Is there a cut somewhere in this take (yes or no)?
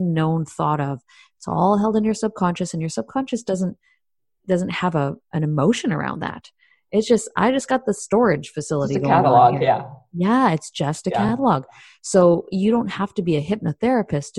no